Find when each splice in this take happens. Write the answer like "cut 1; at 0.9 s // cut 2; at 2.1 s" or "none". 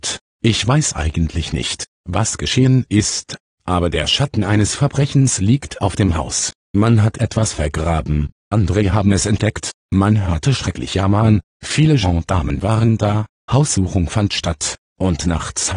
none

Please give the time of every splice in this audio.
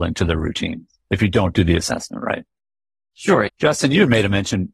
cut 1; at 3.5 s

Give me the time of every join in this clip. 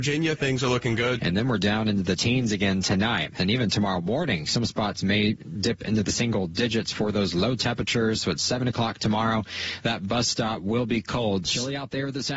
cut 1; at 1.2 s // cut 2; at 11.4 s

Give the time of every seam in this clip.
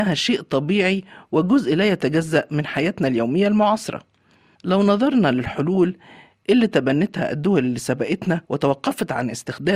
cut 1; at 8.4 s

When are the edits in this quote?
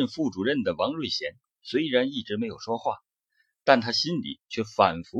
none

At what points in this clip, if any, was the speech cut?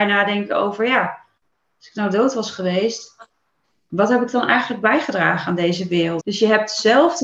cut 1; at 6.2 s

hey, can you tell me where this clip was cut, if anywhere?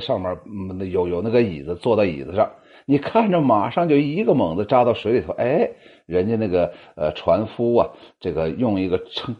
none

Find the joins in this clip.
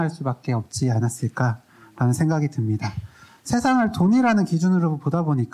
none

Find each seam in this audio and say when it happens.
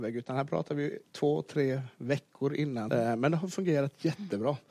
cut 1; at 2.9 s

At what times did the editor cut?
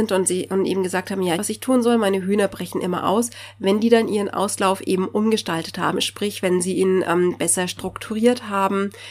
cut 1; at 1.4 s

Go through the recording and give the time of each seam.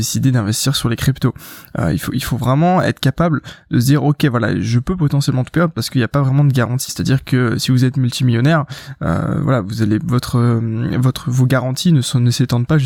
cut 1; at 6.9 s

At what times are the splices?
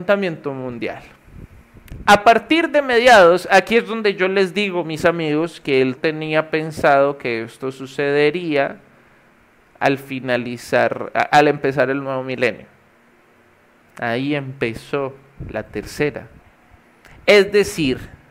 cut 1; at 6.0 s // cut 2; at 13.8 s

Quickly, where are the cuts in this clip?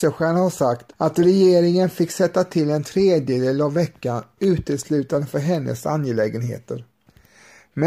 cut 1; at 0.9 s

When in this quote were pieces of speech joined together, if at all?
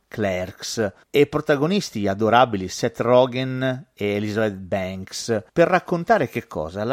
cut 1; at 5.5 s

